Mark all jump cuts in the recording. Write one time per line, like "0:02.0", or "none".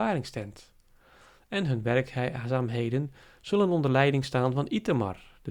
none